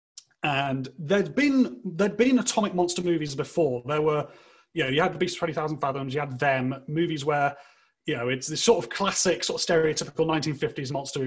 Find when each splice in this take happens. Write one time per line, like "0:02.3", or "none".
none